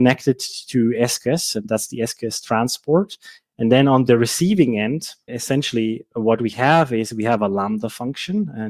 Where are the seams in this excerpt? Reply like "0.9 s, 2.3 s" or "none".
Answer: 3.4 s, 5.3 s